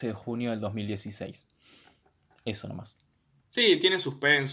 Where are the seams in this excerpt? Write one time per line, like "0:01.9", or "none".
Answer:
0:03.4